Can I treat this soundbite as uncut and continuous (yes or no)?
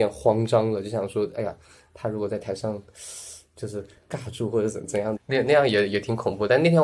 no